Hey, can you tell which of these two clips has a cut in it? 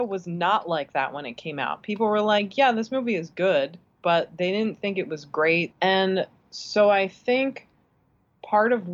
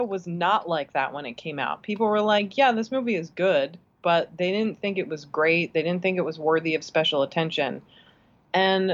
first; 1 cut; at 5.7 s

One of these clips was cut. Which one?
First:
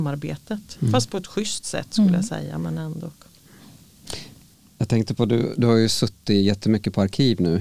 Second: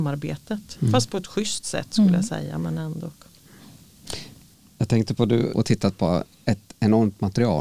second; 1 cut; at 5.5 s

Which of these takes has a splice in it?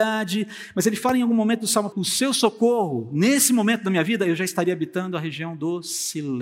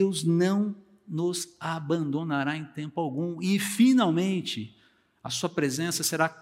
first; 1 cut; at 1.9 s

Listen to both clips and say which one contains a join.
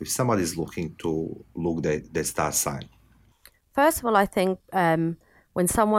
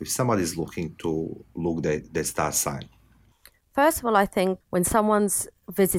second; 1 cut; at 4.6 s

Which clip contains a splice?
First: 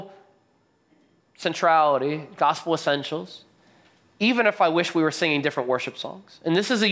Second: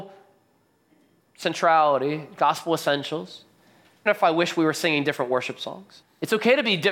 second; 2 cuts; at 4.1 s, 6.0 s

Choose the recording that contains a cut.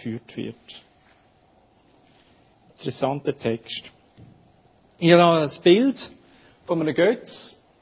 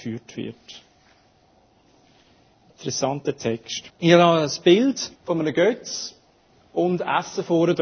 second; 2 cuts; at 3.9 s, 5.2 s

